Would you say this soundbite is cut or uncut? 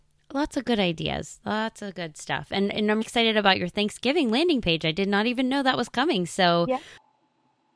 cut